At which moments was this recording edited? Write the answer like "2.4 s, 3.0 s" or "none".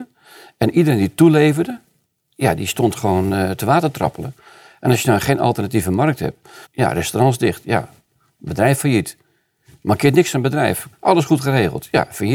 6.6 s, 10.9 s